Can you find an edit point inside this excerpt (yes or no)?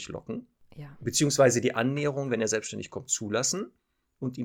no